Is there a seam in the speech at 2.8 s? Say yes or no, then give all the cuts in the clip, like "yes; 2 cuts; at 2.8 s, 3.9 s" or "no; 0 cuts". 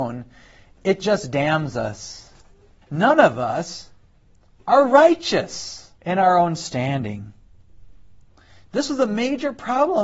yes; 2 cuts; at 2.8 s, 6.0 s